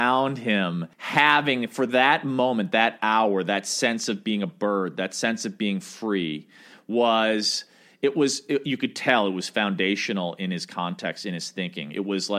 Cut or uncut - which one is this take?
cut